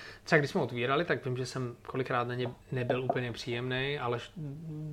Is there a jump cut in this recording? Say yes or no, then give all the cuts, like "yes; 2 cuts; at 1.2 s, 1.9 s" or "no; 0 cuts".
yes; 1 cut; at 2.6 s